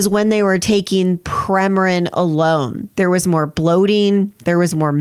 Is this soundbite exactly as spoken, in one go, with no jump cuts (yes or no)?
no